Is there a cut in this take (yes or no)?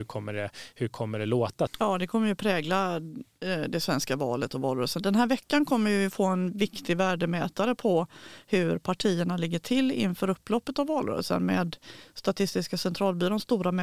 yes